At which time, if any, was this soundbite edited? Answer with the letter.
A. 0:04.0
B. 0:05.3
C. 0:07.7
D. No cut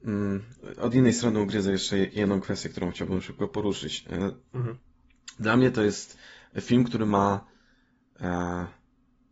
D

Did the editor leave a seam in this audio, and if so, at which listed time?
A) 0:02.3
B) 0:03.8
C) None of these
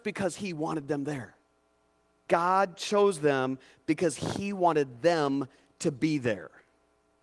A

